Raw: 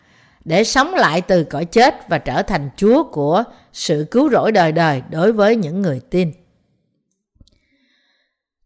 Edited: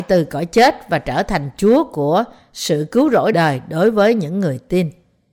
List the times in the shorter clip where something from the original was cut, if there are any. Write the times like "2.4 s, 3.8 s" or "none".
3.3 s